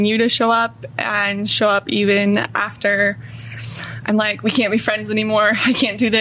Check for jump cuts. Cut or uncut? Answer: uncut